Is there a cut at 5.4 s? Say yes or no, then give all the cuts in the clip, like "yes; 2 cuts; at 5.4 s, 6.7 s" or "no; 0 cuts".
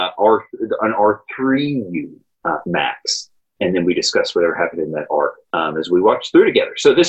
yes; 2 cuts; at 2.3 s, 5.4 s